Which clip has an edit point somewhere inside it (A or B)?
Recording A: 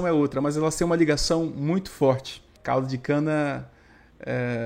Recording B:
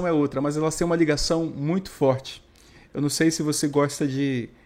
A